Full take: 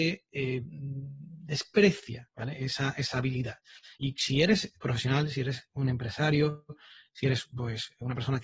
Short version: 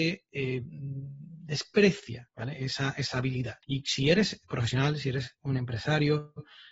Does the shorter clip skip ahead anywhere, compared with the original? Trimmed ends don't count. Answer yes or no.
yes